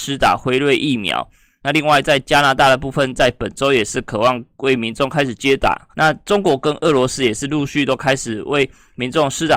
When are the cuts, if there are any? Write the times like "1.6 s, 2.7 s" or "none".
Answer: 5.9 s

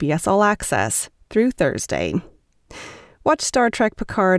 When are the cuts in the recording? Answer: none

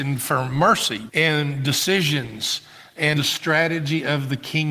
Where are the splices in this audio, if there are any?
1.1 s, 3.1 s

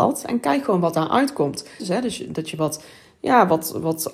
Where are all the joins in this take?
1.8 s

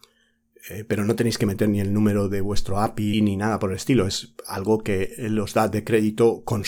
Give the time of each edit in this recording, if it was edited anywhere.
3.1 s

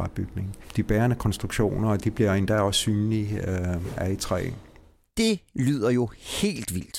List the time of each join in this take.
none

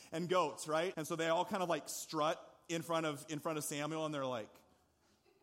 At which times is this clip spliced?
0.9 s

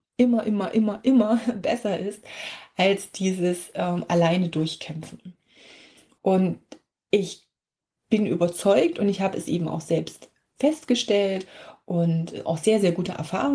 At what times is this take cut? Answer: 6.2 s

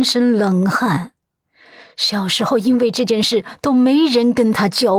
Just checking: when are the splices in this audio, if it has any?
none

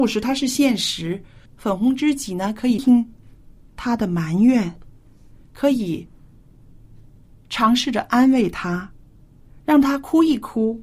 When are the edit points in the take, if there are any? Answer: 1.5 s, 2.8 s

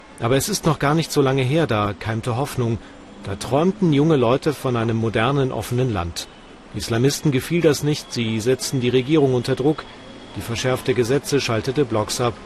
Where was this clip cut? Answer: none

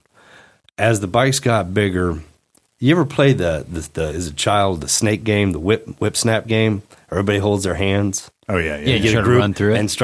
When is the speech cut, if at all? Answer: none

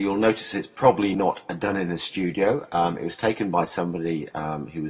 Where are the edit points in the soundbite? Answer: none

